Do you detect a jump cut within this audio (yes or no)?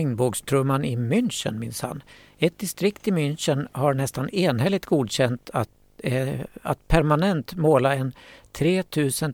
no